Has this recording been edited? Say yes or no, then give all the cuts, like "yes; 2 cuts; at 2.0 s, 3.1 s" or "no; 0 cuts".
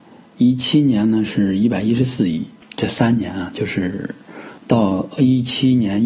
yes; 2 cuts; at 2.6 s, 4.6 s